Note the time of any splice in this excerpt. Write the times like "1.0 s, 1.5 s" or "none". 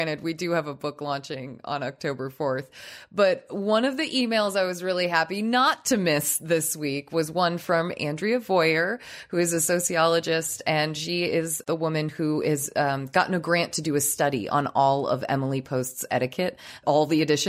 none

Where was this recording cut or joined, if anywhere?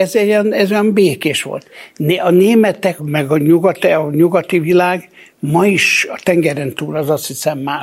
3.0 s

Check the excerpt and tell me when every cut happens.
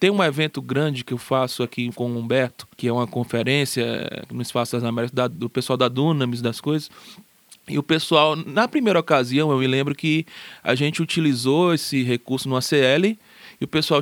2.7 s

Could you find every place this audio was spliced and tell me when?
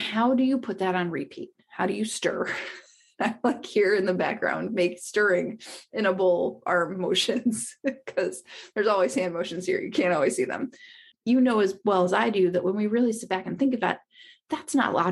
11.1 s

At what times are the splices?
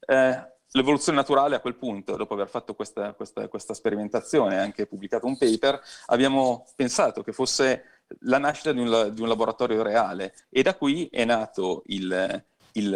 none

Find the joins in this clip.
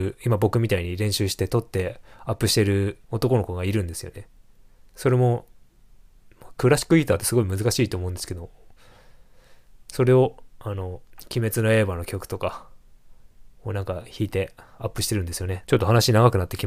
3.0 s, 15.6 s

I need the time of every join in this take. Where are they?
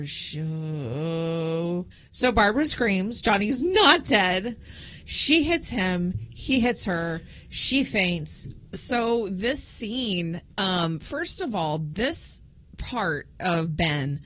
5.0 s, 8.7 s

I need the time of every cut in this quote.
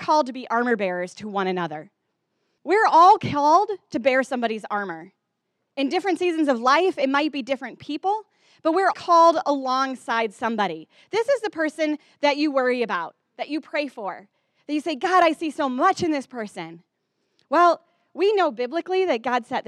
2.6 s, 8.9 s

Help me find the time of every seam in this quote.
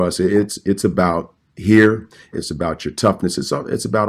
2.3 s

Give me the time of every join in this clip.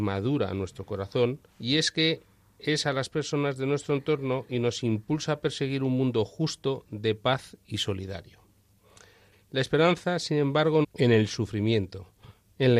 1.5 s, 9.3 s, 10.8 s

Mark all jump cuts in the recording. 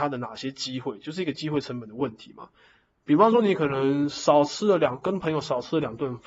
none

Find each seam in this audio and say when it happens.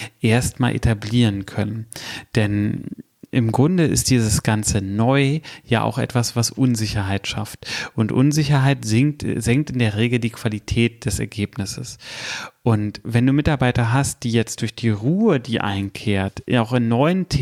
none

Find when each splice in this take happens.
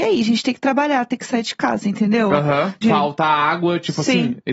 2.8 s

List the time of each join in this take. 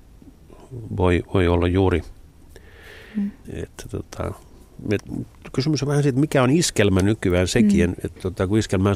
3.4 s

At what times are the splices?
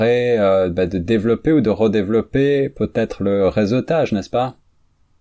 none

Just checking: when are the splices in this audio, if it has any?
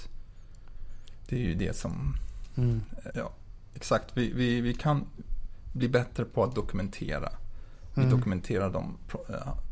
3.1 s

